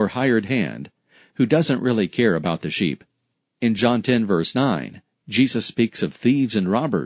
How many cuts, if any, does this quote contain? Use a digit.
0